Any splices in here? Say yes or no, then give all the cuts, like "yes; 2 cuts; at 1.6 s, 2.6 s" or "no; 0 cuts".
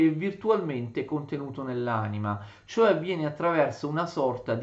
no; 0 cuts